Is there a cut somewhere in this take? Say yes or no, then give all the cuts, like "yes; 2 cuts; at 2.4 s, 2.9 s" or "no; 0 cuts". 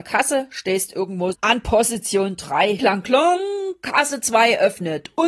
yes; 2 cuts; at 1.3 s, 2.8 s